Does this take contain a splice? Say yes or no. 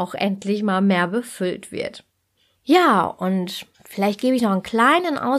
yes